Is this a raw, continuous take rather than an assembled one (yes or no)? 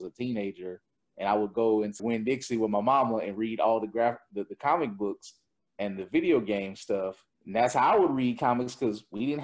no